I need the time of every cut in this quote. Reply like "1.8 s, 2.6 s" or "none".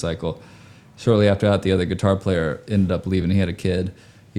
none

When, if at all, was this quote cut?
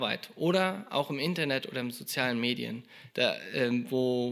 3.1 s

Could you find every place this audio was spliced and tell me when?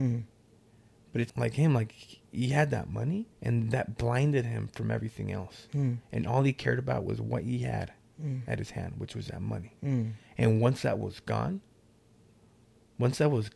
1.3 s, 3.3 s

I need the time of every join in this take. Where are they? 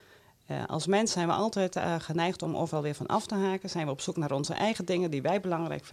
none

